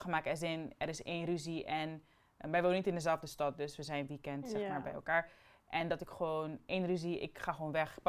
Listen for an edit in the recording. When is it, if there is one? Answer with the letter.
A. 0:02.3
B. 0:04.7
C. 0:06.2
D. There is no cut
D